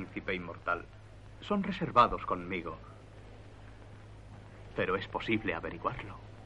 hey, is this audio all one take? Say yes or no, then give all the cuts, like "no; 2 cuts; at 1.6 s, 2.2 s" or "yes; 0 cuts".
yes; 0 cuts